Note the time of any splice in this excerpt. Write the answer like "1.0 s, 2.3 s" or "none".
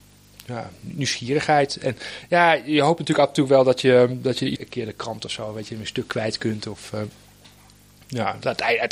4.6 s